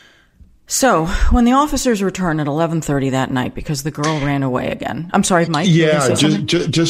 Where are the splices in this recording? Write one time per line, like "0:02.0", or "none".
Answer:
0:05.5